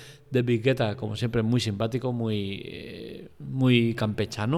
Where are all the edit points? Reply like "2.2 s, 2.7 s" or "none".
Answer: none